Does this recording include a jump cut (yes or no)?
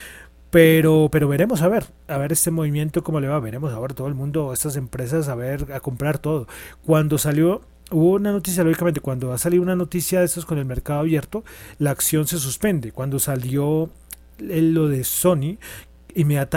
no